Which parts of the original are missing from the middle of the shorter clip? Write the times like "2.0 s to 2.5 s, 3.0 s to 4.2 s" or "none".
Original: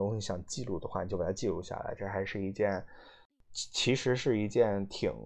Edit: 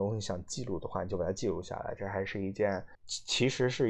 2.9 s to 3.4 s